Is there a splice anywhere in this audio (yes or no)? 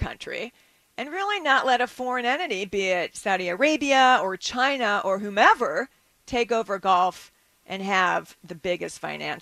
no